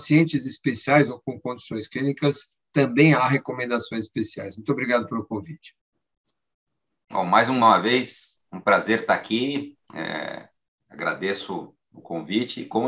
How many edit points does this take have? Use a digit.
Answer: 0